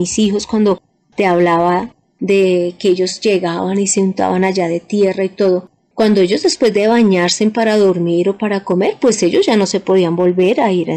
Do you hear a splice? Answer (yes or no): no